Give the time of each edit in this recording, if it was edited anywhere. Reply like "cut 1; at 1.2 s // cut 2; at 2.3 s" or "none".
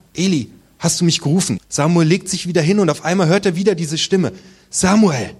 cut 1; at 1.6 s